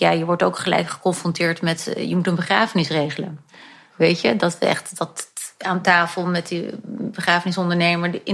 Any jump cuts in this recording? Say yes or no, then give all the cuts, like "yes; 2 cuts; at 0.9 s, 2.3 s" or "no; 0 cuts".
yes; 1 cut; at 3.9 s